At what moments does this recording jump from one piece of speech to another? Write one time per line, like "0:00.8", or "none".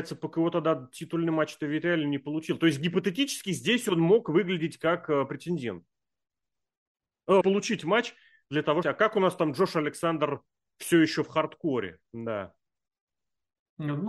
0:07.4
0:08.8